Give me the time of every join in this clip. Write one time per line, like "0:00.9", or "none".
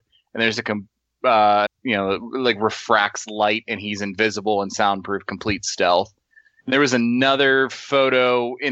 0:01.7